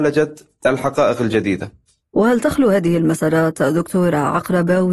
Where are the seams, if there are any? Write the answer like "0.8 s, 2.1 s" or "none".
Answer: none